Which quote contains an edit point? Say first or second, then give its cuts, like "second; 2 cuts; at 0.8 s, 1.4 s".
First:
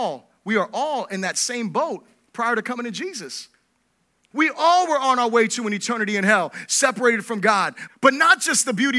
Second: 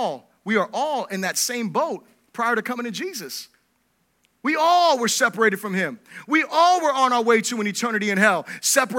first; 2 cuts; at 4.3 s, 7.9 s